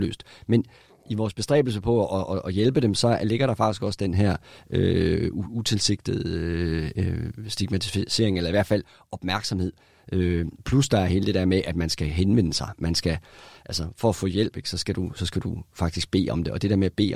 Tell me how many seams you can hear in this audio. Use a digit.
0